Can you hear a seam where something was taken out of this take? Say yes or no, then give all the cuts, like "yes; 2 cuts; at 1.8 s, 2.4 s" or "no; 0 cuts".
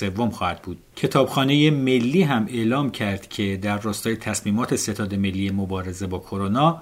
yes; 1 cut; at 0.9 s